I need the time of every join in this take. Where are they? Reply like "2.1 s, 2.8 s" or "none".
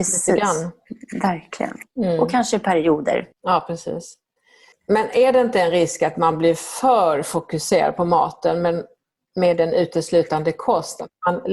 3.3 s